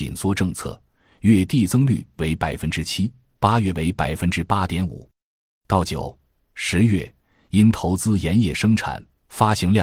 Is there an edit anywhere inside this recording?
no; 0 cuts

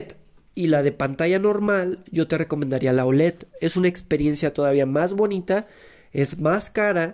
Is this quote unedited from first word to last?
yes; 0 cuts

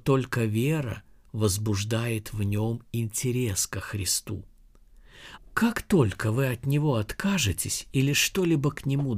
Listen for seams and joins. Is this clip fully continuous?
no; 1 cut; at 5.4 s

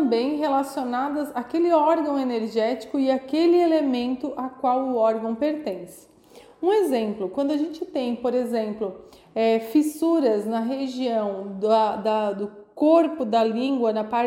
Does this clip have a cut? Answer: no; 0 cuts

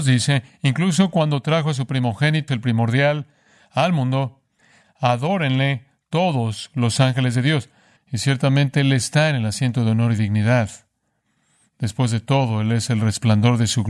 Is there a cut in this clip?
yes; 2 cuts; at 2.5 s, 8.0 s

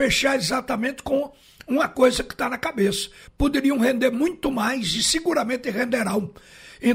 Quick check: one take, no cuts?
no; 1 cut; at 3.3 s

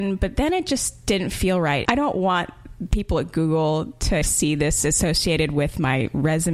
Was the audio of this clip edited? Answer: yes; 2 cuts; at 1.9 s, 4.2 s

